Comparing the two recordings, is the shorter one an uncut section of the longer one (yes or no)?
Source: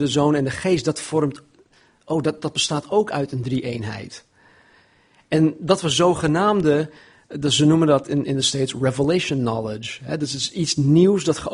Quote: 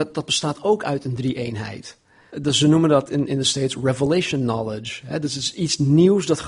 no